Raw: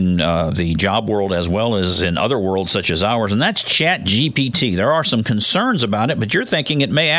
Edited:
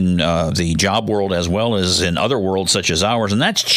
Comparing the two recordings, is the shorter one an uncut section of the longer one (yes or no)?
yes